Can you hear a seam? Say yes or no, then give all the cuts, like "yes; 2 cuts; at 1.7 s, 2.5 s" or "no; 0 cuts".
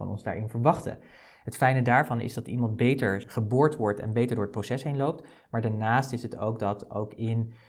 no; 0 cuts